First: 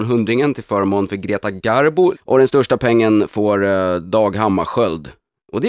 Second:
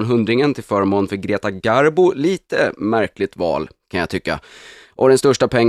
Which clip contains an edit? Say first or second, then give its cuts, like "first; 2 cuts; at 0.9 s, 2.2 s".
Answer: first; 1 cut; at 2.1 s